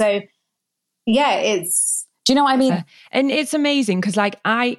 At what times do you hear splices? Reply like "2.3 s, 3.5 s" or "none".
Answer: 2.7 s

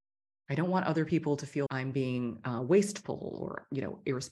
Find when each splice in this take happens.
1.7 s

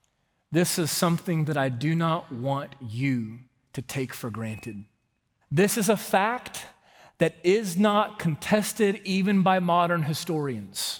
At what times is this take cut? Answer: 5.4 s

